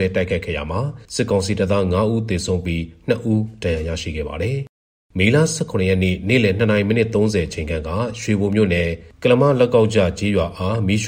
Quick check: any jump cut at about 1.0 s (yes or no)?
yes